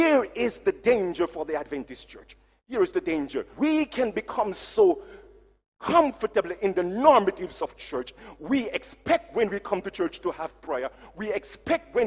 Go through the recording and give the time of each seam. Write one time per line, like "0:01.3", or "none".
0:03.5